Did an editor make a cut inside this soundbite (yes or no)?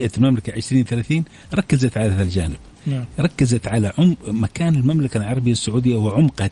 no